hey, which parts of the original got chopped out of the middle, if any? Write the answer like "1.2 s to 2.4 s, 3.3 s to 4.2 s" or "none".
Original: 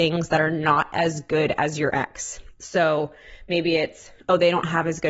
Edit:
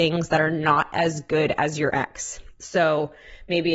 none